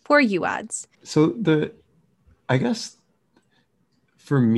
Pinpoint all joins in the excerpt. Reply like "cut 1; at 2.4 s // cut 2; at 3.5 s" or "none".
cut 1; at 0.9 s